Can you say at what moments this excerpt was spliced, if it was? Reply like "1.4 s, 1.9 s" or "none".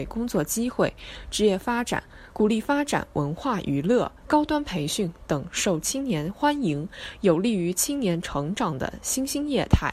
2.3 s, 4.2 s